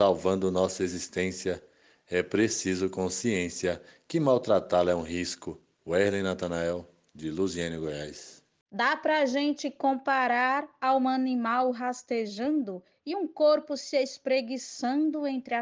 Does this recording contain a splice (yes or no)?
yes